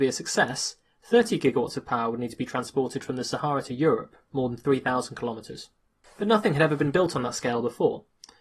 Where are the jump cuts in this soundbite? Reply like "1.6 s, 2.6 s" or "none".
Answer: 6.0 s